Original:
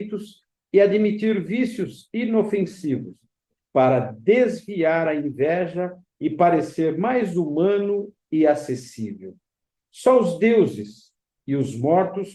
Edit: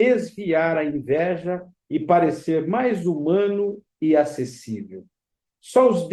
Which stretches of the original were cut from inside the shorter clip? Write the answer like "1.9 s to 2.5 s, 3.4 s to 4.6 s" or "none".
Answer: none